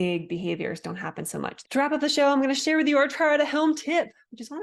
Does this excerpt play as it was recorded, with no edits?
no; 1 cut; at 1.6 s

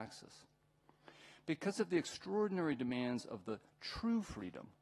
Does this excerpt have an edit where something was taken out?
no; 0 cuts

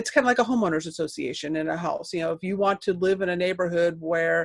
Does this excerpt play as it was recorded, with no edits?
yes; 0 cuts

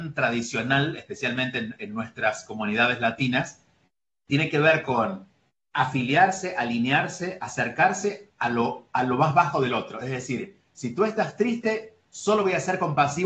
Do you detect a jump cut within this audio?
no; 0 cuts

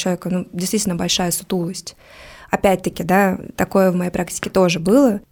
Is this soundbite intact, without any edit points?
yes; 0 cuts

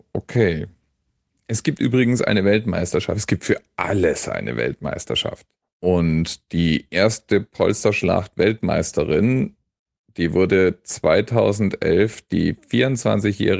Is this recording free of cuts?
yes; 0 cuts

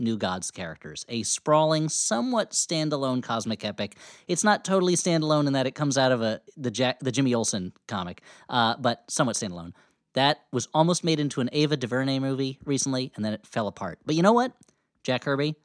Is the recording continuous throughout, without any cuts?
yes; 0 cuts

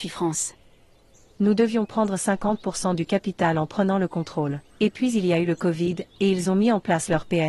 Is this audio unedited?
no; 1 cut; at 4.7 s

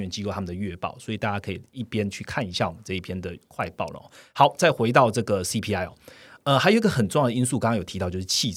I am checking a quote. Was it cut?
no; 0 cuts

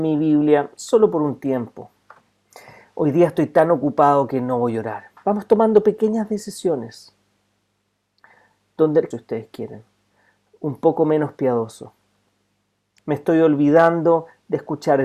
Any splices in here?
yes; 2 cuts; at 9.1 s, 13.0 s

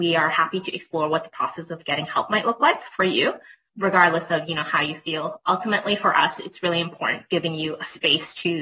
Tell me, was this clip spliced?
yes; 1 cut; at 3.7 s

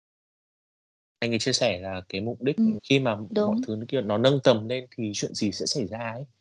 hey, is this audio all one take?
no; 1 cut; at 2.8 s

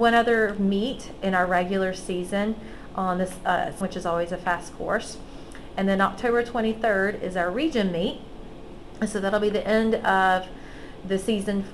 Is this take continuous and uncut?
no; 1 cut; at 3.8 s

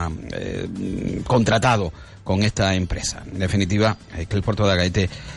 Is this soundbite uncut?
yes; 0 cuts

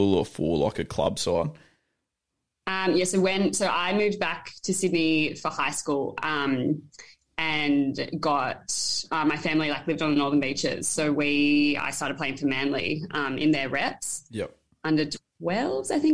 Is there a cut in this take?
no; 0 cuts

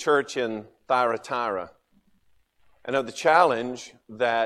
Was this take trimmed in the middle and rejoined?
no; 0 cuts

